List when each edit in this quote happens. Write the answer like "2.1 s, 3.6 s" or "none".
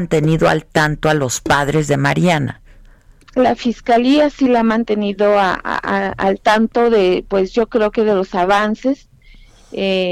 none